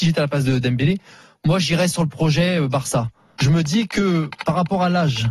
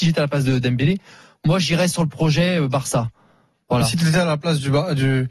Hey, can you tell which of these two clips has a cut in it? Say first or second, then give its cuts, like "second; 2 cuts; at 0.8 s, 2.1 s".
first; 1 cut; at 3.4 s